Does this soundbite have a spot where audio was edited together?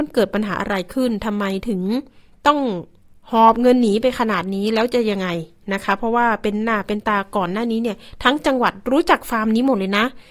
no; 0 cuts

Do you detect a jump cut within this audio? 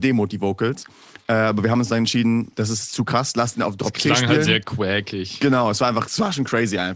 no; 0 cuts

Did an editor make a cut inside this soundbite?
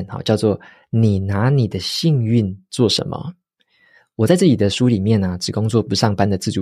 no; 0 cuts

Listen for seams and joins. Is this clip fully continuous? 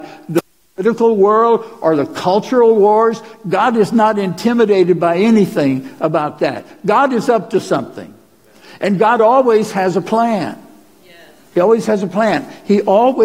yes; 0 cuts

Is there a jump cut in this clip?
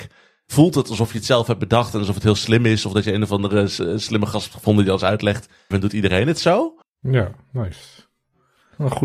yes; 2 cuts; at 5.7 s, 6.8 s

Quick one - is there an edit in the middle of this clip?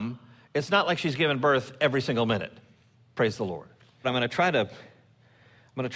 yes; 1 cut; at 4.0 s

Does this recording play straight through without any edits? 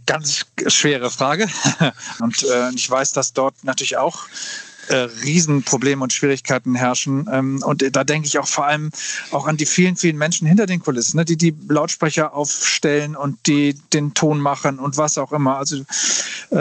no; 1 cut; at 2.2 s

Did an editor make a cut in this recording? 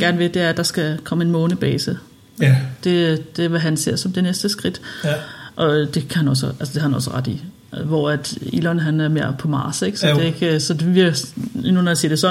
no; 0 cuts

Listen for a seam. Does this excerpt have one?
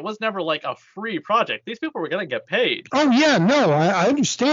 no; 0 cuts

